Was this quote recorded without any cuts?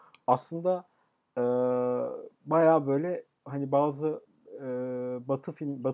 yes; 0 cuts

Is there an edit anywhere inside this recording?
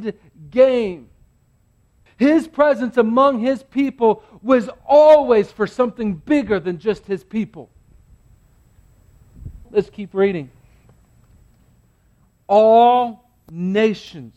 yes; 2 cuts; at 2.1 s, 9.6 s

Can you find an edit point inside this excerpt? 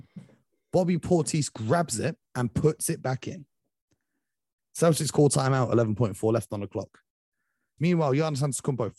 yes; 3 cuts; at 2.3 s, 4.6 s, 7.8 s

